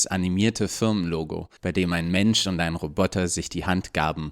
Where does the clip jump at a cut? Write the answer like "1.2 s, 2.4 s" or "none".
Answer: 1.6 s